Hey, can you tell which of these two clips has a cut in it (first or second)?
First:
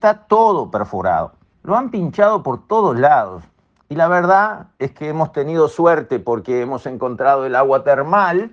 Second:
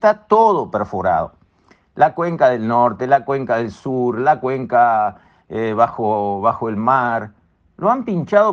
first